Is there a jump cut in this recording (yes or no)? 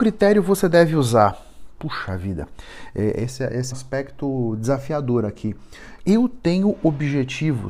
yes